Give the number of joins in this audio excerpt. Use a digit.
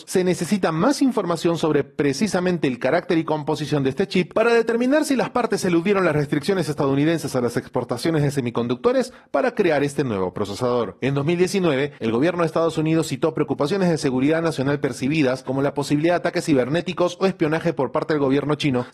0